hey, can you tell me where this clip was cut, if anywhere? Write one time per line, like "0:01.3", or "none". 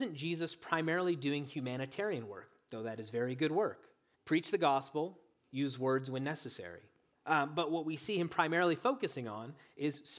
0:04.1
0:07.1